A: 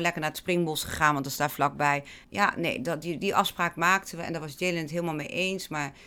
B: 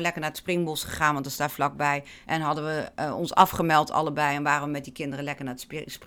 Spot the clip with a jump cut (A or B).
A